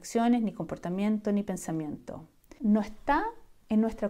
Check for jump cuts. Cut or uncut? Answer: cut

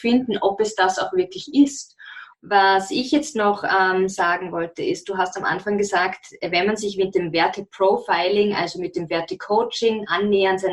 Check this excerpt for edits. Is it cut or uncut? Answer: cut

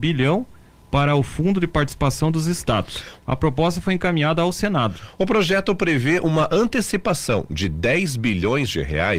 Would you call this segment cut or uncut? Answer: cut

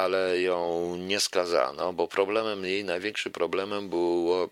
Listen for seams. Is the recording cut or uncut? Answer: uncut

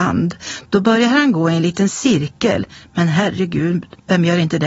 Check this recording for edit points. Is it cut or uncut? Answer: uncut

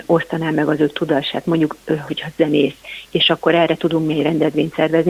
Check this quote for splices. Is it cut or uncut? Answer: uncut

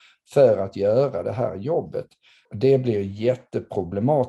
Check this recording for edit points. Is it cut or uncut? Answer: cut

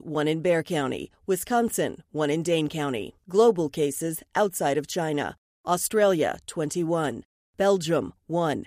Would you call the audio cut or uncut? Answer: uncut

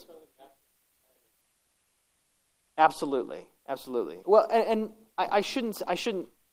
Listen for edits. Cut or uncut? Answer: cut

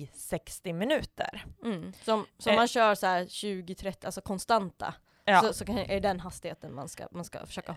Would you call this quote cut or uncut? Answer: uncut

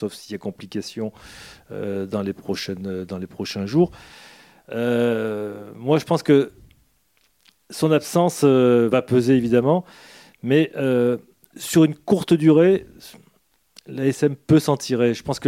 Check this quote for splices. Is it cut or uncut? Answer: uncut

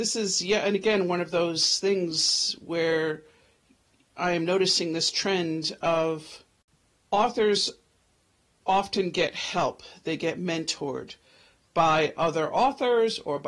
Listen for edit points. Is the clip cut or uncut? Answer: uncut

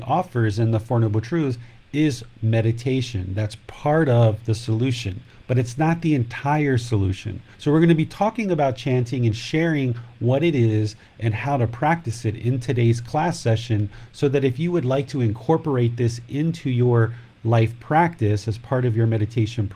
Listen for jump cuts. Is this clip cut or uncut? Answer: cut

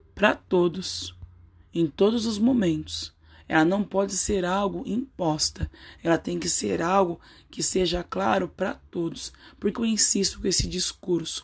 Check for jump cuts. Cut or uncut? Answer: cut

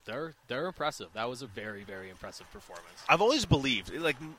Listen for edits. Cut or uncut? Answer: uncut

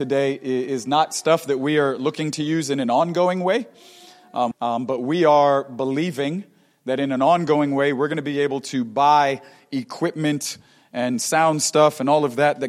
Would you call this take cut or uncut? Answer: cut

